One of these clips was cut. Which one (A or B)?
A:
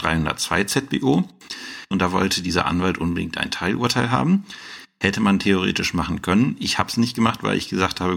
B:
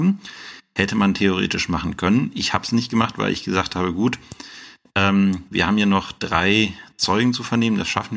A